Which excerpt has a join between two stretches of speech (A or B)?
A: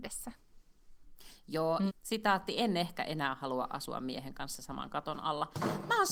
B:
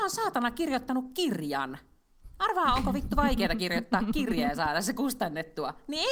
A